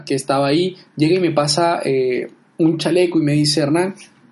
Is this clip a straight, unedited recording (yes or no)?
yes